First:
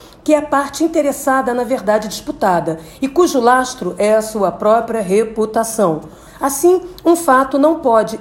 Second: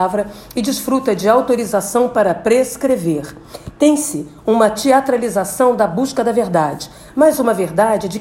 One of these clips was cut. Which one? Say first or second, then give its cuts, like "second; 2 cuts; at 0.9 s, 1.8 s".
first; 1 cut; at 6.3 s